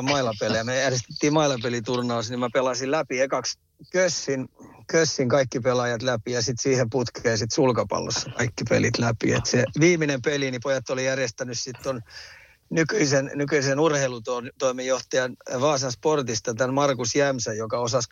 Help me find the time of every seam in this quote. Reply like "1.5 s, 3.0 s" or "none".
none